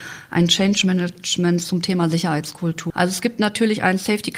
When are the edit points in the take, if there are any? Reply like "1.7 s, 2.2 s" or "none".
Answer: 2.9 s